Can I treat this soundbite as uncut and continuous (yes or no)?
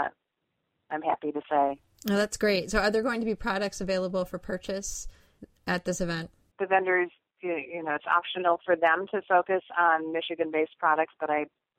no